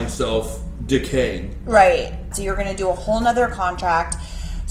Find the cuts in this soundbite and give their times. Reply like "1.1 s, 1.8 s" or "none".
2.3 s